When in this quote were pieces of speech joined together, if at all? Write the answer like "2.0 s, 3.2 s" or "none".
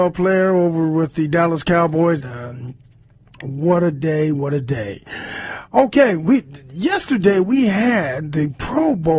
2.2 s